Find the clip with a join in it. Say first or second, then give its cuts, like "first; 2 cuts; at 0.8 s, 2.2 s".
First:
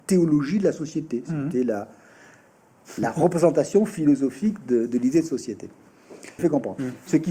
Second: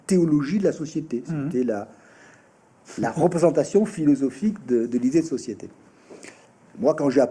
first; 1 cut; at 6.4 s